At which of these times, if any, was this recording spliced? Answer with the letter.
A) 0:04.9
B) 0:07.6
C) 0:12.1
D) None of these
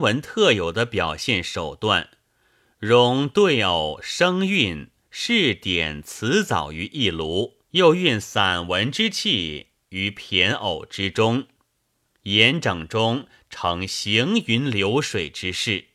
B